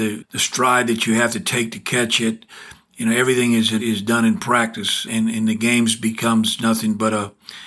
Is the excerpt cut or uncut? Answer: cut